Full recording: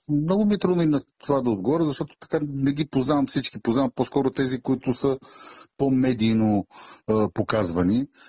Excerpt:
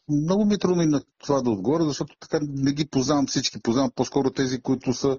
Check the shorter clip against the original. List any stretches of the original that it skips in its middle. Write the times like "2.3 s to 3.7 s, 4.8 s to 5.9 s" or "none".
none